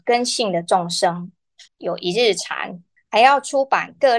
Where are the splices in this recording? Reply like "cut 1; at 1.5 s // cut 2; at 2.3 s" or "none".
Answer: cut 1; at 1.7 s // cut 2; at 3.0 s